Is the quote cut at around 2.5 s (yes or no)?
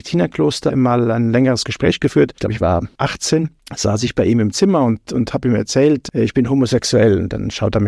no